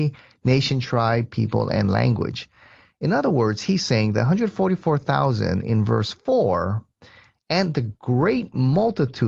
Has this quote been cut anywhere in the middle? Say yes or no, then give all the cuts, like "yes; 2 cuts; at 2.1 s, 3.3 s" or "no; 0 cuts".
no; 0 cuts